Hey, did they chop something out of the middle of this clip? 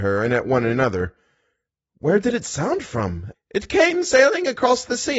yes; 1 cut; at 3.3 s

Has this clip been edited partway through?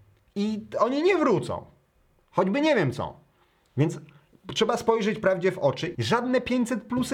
yes; 1 cut; at 5.9 s

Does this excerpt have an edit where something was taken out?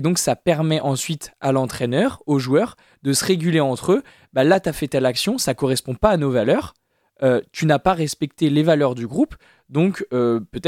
no; 0 cuts

